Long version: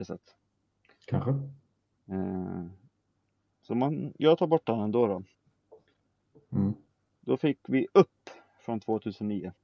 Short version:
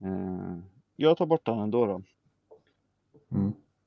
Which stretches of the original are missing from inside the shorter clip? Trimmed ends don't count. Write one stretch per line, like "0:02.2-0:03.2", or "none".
0:03.0-0:04.2